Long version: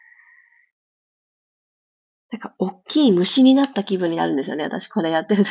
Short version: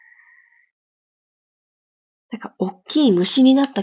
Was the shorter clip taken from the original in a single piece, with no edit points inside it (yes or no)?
yes